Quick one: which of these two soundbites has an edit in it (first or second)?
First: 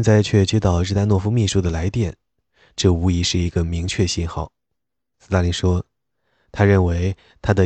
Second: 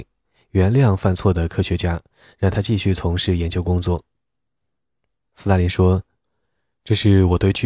first